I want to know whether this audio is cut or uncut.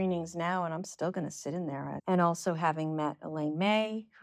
cut